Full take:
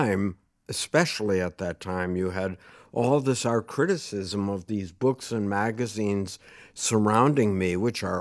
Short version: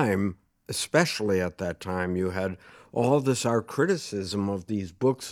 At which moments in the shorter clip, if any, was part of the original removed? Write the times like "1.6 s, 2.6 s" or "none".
none